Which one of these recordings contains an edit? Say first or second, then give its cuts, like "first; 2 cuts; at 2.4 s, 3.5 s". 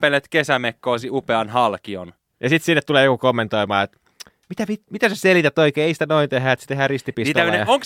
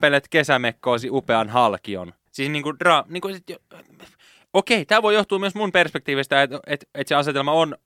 second; 1 cut; at 2.3 s